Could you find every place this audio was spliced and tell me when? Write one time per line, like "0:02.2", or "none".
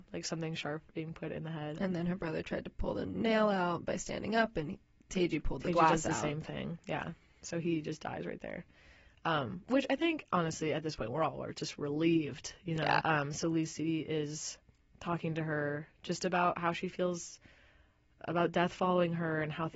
0:13.0